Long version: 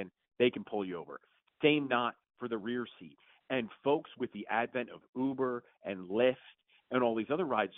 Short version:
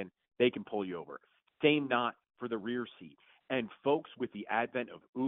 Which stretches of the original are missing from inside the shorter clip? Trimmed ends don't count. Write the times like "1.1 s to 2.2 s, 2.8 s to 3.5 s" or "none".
none